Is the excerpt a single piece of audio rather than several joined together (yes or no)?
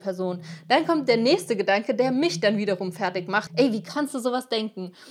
no